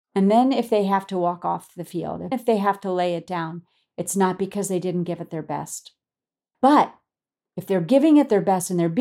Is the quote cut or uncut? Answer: cut